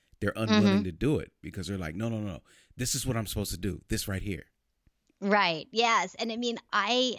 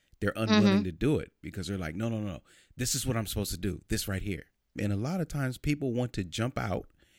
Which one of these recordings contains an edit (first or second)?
second